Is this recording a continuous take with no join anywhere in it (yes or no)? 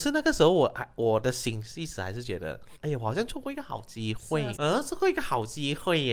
no